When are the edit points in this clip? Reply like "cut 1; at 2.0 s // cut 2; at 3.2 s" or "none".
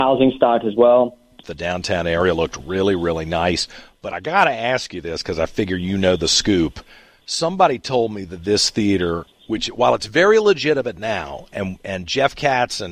cut 1; at 1.4 s